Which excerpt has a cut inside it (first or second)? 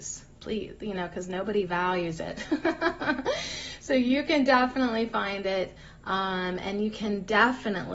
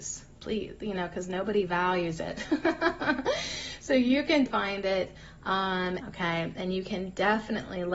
second